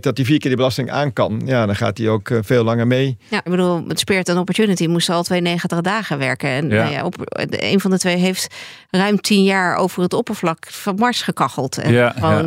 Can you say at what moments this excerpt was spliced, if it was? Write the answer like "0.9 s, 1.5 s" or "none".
3.5 s